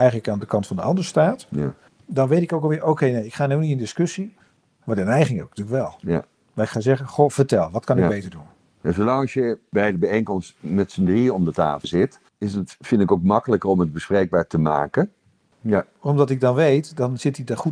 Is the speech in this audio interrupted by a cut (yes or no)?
yes